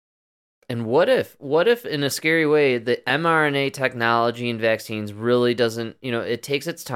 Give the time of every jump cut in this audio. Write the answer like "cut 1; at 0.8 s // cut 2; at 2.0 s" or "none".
none